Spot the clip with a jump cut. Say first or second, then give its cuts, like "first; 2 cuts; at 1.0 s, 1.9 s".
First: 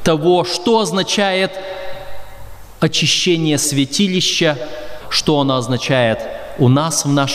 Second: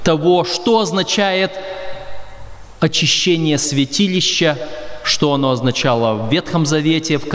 first; 1 cut; at 5.0 s